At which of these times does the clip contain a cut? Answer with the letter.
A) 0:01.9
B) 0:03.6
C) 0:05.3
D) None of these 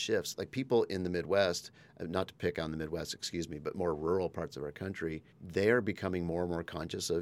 C